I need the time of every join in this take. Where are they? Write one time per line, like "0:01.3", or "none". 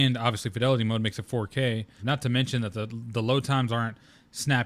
0:02.0